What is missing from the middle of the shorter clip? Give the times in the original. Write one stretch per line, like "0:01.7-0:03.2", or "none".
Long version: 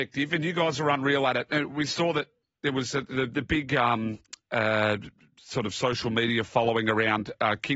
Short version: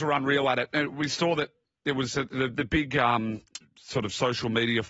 0:04.4-0:05.2